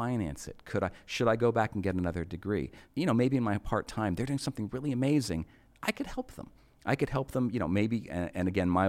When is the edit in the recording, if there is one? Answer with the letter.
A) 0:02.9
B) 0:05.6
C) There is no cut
A